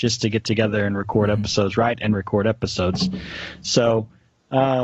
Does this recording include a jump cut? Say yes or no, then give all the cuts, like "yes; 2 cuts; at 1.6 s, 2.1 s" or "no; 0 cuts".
no; 0 cuts